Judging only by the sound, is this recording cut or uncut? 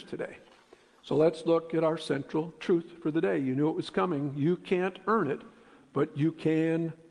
uncut